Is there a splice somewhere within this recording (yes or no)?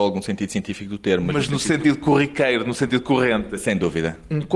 no